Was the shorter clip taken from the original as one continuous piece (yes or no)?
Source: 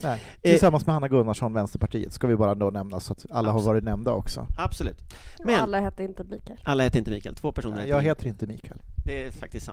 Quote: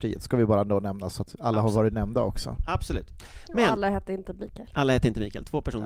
yes